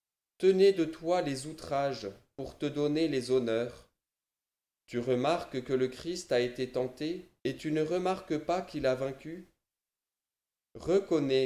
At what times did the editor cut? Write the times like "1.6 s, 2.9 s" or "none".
4.8 s, 7.4 s